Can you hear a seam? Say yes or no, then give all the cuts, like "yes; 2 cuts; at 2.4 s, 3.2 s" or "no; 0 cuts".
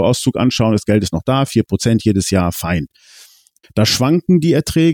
yes; 1 cut; at 3.6 s